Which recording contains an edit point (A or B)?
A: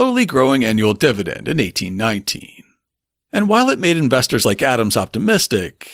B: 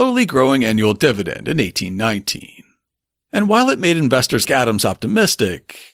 B